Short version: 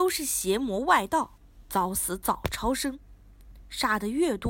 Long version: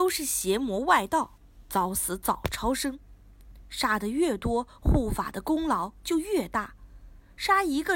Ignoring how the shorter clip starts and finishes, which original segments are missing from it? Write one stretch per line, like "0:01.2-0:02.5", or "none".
none